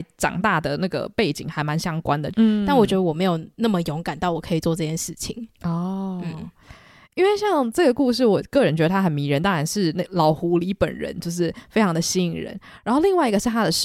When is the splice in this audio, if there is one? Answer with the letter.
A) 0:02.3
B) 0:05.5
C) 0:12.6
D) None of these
A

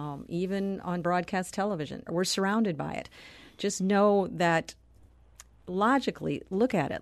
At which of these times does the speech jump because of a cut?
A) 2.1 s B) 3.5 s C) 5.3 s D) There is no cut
A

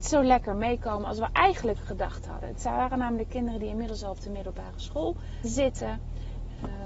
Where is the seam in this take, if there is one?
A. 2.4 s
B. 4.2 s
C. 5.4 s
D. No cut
C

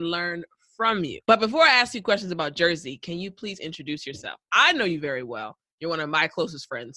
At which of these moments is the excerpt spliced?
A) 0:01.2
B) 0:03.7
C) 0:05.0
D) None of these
A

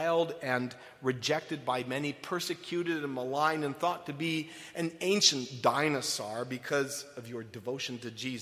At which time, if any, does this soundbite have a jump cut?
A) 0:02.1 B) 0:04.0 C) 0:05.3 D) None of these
D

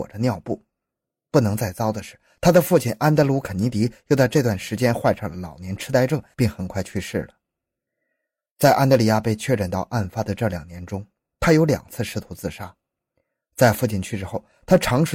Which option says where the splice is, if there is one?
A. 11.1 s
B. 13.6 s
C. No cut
C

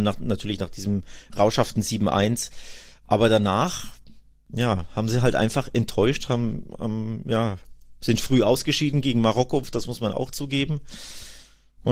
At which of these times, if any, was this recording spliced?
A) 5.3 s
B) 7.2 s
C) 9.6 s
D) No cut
C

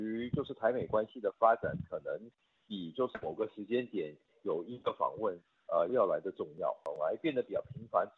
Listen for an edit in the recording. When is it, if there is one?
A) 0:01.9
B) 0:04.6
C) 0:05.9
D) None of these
C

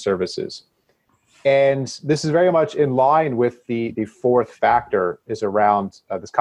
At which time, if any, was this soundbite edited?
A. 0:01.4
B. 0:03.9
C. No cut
B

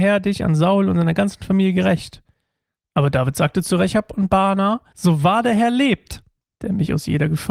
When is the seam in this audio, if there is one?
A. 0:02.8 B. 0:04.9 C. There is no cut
B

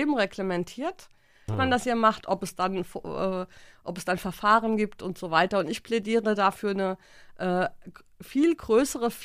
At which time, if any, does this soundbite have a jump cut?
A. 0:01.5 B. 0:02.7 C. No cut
A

